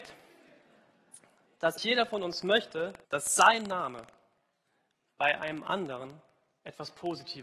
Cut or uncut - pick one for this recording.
cut